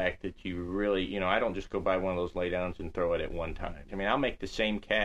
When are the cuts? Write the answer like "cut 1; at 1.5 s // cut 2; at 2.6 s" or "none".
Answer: cut 1; at 3.9 s

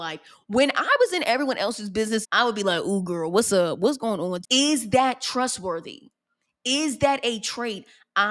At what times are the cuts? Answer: cut 1; at 2.2 s // cut 2; at 4.4 s

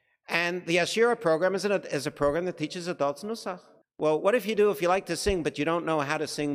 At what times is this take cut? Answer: cut 1; at 3.8 s

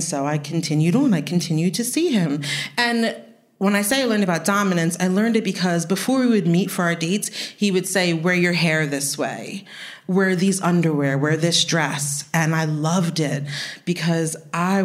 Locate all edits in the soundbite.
none

